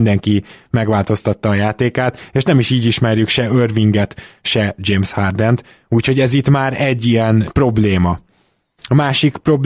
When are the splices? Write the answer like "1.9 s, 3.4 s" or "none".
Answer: none